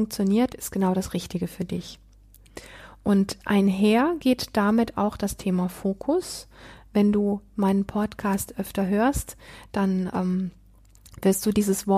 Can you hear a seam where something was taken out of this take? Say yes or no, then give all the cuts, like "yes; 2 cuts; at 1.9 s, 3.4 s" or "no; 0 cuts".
no; 0 cuts